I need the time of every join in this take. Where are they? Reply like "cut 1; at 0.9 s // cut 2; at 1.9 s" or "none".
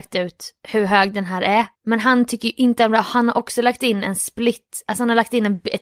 cut 1; at 1.8 s

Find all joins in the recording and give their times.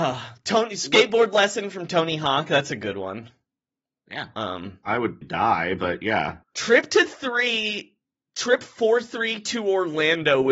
cut 1; at 5.2 s // cut 2; at 6.4 s

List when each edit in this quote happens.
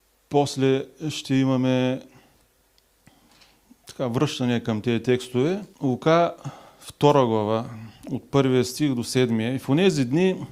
cut 1; at 5.7 s

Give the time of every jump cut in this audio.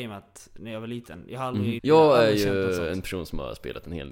cut 1; at 1.8 s

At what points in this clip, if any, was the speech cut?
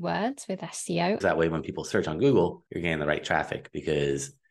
cut 1; at 1.2 s // cut 2; at 2.7 s

